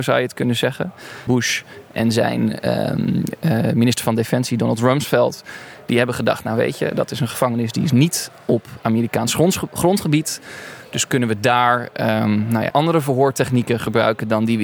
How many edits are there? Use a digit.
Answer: 2